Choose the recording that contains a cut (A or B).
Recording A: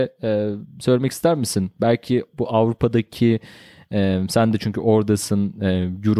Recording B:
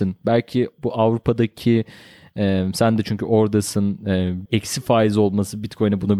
B